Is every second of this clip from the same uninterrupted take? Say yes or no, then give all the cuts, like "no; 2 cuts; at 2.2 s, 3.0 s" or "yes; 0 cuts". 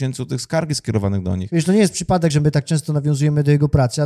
yes; 0 cuts